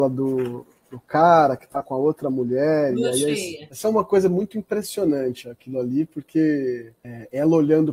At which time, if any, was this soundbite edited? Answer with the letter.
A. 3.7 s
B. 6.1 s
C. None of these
A